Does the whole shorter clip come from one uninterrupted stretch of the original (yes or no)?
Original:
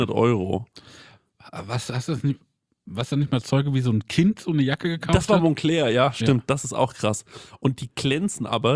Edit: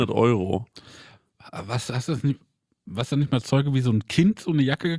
yes